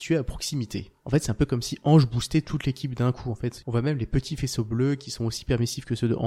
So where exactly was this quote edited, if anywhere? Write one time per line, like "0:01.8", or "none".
none